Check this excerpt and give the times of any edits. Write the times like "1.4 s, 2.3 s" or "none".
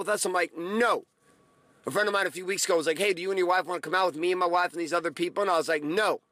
none